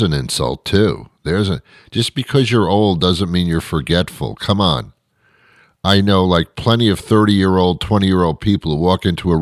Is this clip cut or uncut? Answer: uncut